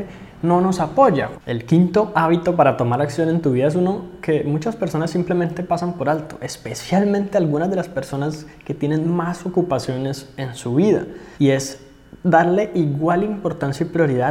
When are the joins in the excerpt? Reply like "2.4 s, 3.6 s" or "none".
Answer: 1.3 s, 11.3 s